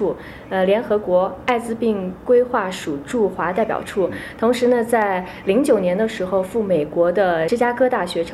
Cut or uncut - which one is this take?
uncut